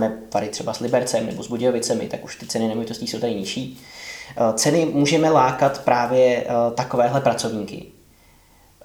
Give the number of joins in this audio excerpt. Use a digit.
0